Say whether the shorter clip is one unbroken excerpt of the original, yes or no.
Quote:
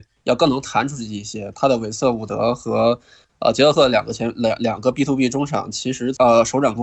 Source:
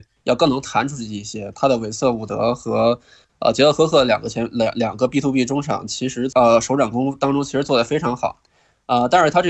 no